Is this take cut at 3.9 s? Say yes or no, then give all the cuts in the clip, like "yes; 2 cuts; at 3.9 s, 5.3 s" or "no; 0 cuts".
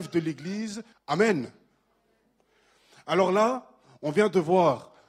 no; 1 cut; at 0.9 s